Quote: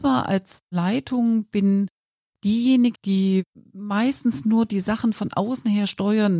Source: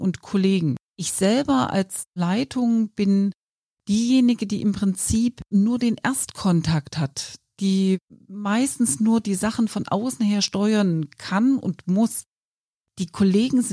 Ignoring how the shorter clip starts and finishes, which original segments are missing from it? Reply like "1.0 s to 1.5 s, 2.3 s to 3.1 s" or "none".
4.4 s to 7.5 s